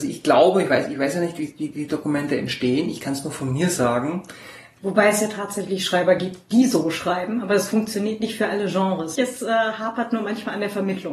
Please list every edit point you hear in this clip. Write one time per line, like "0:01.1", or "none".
0:04.8
0:09.2